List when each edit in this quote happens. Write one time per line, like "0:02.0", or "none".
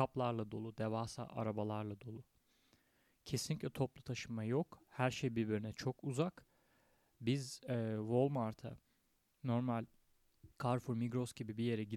0:10.5